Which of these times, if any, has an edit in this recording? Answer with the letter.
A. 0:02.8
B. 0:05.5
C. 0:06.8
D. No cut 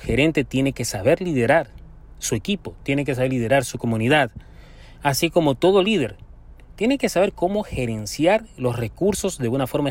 A